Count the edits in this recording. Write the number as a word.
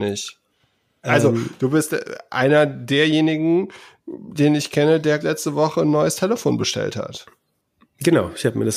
two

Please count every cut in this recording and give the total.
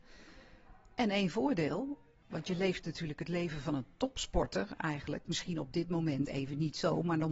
one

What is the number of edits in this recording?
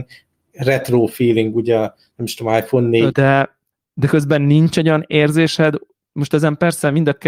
one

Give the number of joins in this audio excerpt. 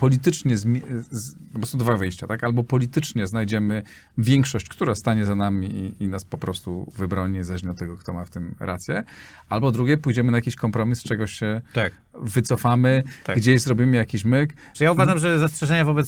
one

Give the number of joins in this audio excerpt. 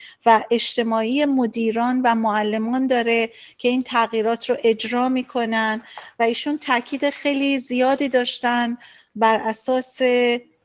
zero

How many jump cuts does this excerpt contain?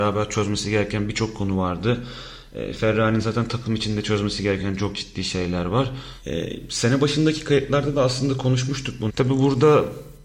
one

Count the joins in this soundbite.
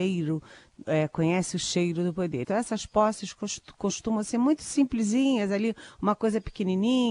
one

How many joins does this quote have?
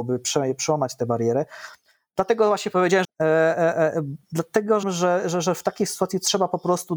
two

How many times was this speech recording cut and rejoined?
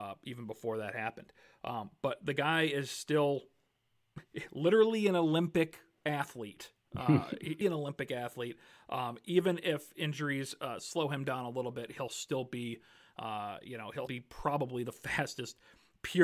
two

